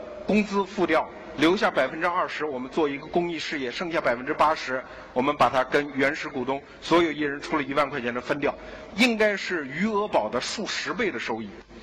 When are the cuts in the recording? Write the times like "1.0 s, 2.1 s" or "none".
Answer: 8.9 s